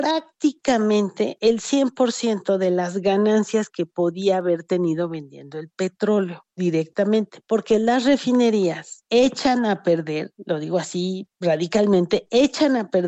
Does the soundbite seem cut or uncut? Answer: cut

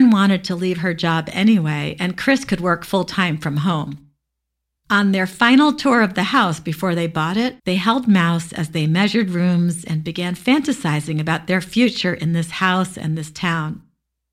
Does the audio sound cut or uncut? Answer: cut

